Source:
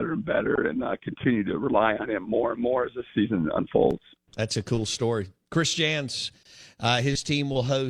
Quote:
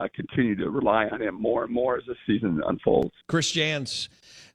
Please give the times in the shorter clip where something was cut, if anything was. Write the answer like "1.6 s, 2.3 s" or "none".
3.2 s